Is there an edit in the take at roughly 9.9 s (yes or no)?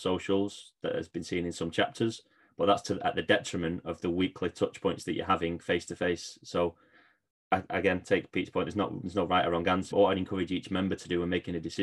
yes